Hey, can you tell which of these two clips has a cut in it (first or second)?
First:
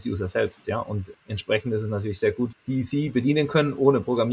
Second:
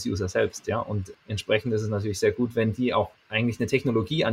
first